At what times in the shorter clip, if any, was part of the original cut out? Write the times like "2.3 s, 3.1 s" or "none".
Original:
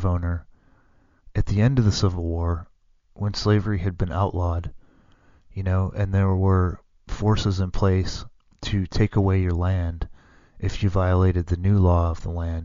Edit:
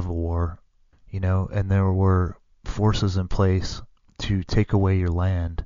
0.9 s

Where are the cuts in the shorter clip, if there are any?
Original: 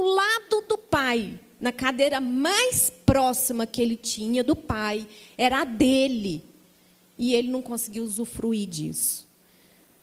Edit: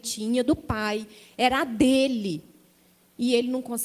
none

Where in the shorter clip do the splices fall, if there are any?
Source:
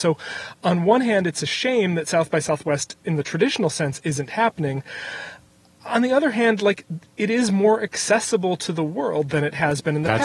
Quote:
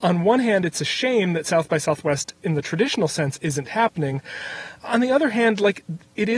4.8 s

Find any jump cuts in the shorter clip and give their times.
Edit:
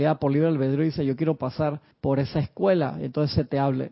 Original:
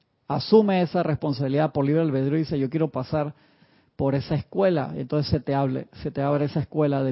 1.9 s

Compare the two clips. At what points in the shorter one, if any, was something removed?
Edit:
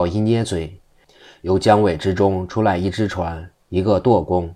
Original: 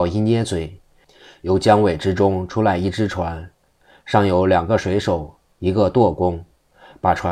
3.6 s

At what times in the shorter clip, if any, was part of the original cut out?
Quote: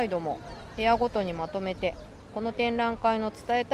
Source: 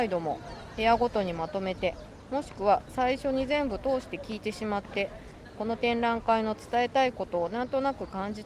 2.3 s

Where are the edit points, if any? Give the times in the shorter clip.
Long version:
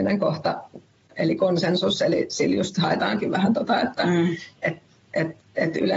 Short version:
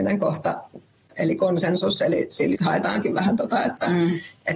2.6 s

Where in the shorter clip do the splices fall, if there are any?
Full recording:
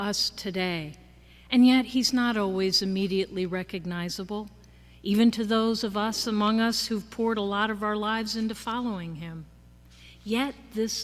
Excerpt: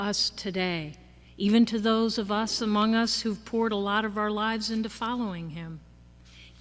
1.2 s

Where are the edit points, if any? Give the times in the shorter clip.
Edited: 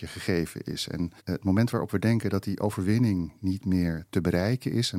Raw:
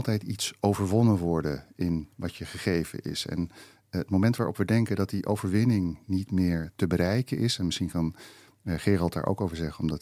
1.2 s

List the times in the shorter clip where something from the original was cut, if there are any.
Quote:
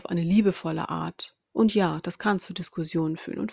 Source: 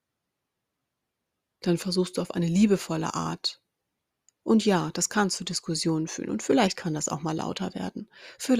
1.4 s

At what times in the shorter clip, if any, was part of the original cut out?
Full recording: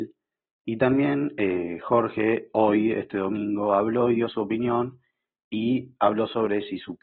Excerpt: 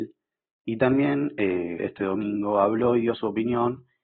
1.8 s

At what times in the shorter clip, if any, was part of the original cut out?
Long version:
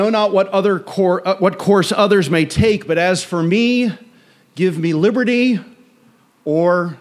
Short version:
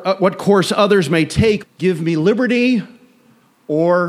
1.6 s

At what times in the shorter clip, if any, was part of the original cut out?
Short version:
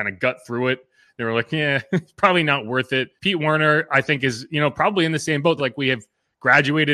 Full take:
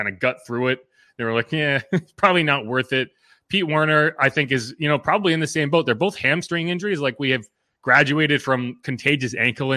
3.2 s, 5.6 s

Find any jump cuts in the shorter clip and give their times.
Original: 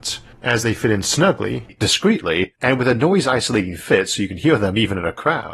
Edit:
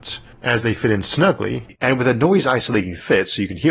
1.8 s

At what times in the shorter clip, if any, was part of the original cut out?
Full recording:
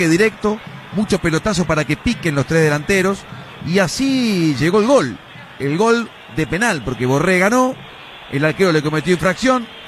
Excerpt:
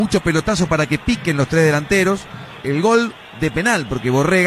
2.6 s

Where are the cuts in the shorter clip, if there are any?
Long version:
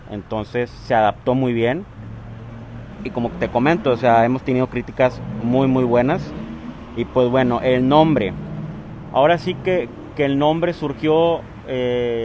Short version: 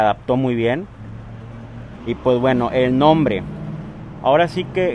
2.0 s

